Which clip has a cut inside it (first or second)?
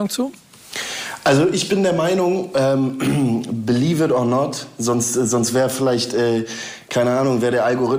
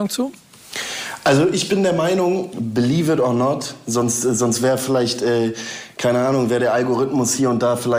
second